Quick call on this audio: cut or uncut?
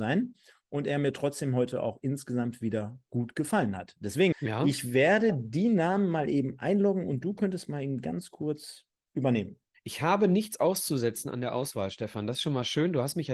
cut